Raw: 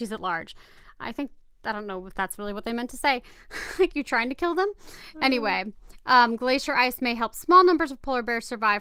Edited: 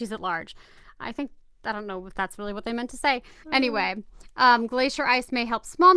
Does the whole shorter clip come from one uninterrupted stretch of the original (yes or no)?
no